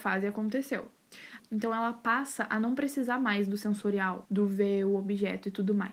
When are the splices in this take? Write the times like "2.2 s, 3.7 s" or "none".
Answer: 1.4 s, 4.2 s

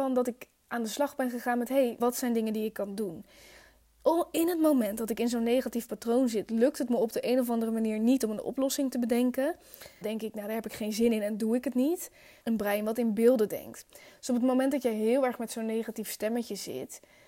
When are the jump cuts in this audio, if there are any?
2.0 s, 10.0 s, 12.4 s

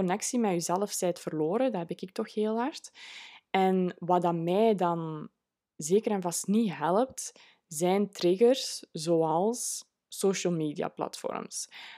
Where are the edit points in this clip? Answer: none

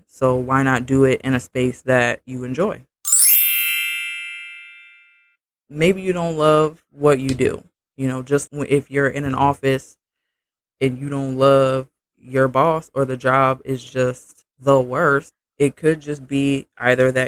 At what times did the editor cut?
8.5 s

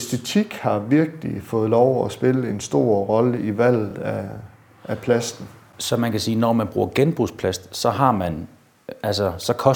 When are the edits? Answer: none

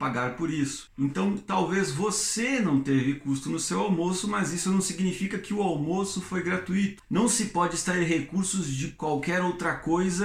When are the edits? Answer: 7.0 s

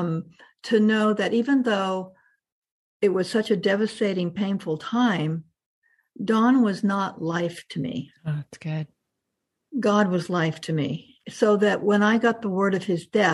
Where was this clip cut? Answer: 11.2 s

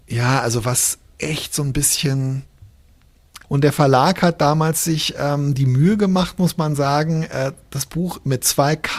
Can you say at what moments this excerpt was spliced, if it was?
3.4 s

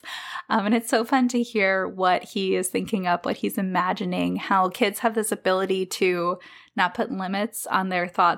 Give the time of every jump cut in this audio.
none

